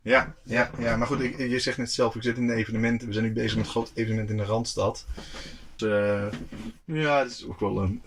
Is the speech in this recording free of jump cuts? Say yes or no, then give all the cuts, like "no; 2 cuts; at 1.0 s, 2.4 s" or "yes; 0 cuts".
no; 1 cut; at 5.8 s